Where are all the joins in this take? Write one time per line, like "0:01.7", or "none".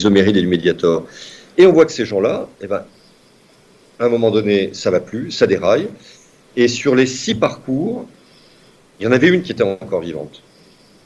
none

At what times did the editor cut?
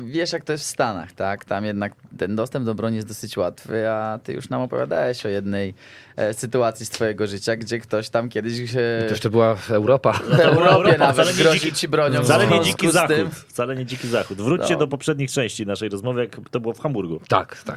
none

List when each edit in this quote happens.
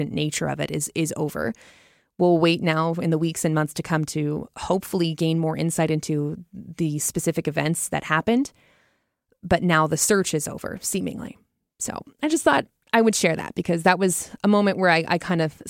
none

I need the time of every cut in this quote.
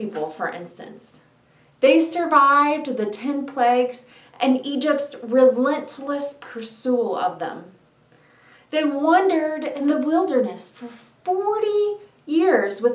none

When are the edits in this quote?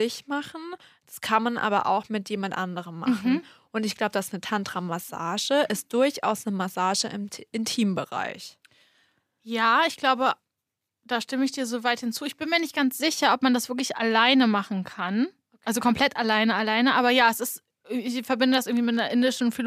none

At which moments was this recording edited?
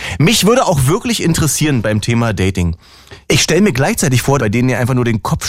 0:03.2
0:04.4

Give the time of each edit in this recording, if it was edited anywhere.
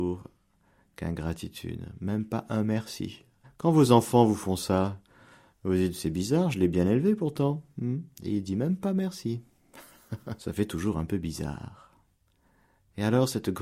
0:03.4
0:08.1
0:10.4

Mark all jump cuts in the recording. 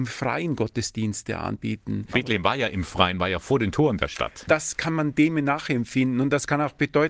0:02.1
0:04.5

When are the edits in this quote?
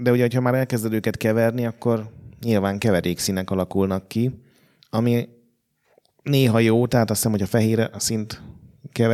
none

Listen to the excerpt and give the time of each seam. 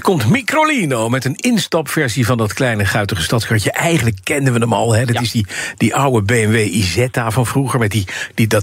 none

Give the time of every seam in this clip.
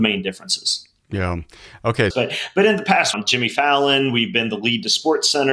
0:02.1
0:03.1

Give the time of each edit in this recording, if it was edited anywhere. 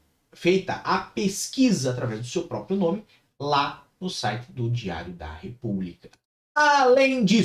0:06.4

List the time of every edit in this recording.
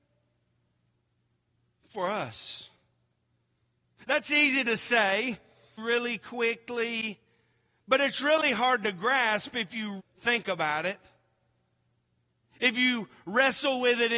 0:05.8
0:10.0

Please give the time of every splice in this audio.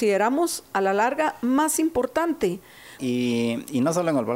0:03.0

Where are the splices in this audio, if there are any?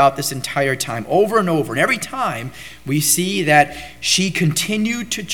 none

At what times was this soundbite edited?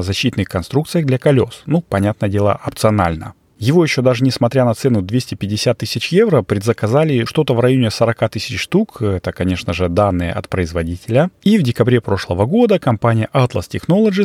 0:07.3

